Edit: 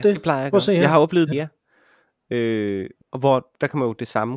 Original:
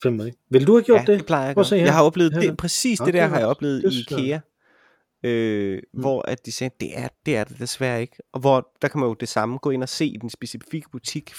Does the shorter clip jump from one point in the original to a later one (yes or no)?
yes